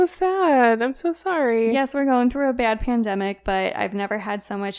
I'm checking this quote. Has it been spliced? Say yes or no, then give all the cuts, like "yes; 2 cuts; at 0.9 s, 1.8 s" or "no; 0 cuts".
no; 0 cuts